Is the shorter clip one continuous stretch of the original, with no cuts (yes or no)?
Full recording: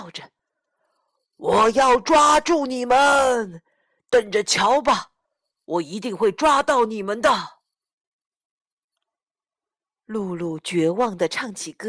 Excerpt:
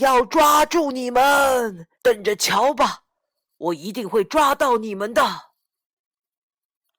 no